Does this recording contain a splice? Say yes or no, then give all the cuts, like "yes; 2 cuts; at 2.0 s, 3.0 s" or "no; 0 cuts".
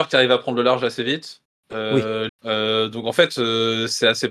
yes; 1 cut; at 2.3 s